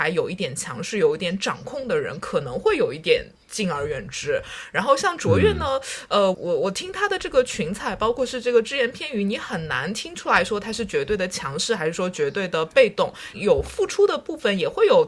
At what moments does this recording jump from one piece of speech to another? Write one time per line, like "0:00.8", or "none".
0:06.3
0:13.3